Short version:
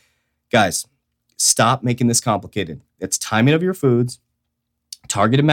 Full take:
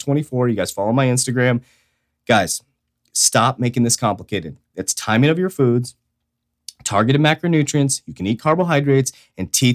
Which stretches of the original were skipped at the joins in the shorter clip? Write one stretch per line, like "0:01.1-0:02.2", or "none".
none